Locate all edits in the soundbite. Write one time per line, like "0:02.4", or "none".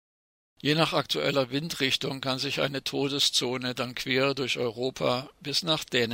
none